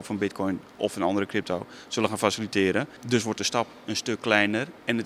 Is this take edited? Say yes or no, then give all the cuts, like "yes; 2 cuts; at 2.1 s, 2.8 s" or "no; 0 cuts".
yes; 1 cut; at 3.0 s